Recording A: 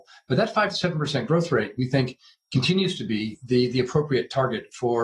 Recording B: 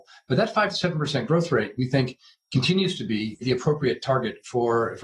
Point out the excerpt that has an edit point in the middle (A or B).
B